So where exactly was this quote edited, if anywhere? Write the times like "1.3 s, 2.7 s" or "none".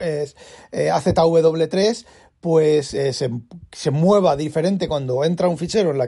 none

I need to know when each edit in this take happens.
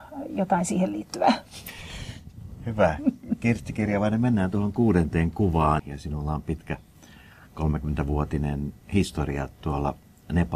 5.8 s, 8.8 s

